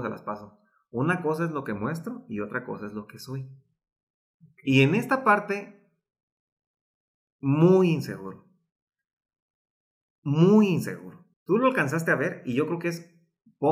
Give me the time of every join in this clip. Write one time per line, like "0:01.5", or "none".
0:11.3